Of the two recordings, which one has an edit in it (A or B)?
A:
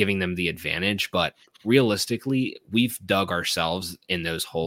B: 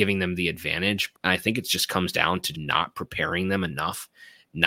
B